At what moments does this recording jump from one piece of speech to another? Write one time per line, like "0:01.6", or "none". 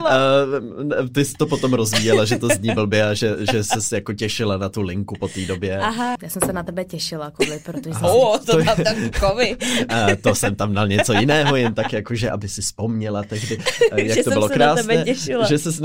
0:06.2
0:08.4